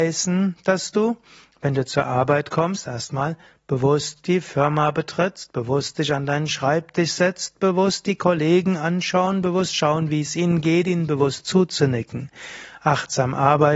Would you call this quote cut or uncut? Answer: uncut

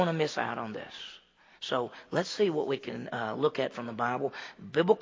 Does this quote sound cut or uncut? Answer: uncut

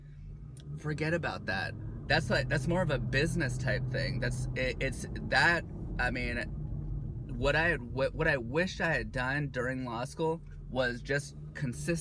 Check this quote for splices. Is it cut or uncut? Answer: cut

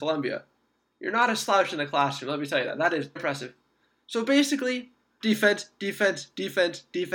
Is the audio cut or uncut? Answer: cut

